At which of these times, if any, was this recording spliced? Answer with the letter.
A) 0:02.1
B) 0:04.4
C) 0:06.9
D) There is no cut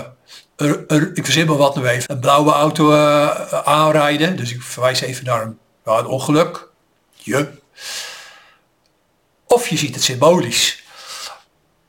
A